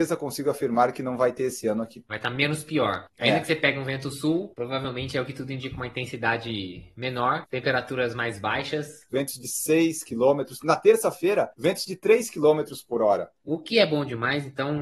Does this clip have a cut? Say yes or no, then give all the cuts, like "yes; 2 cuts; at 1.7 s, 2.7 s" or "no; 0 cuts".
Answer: yes; 3 cuts; at 2.1 s, 9.1 s, 13.4 s